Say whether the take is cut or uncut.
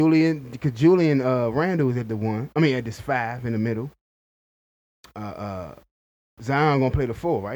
uncut